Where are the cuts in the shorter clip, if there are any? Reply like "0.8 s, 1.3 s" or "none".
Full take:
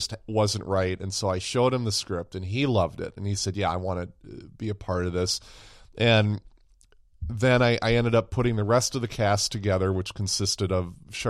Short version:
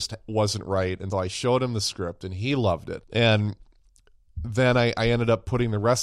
1.1 s, 3.0 s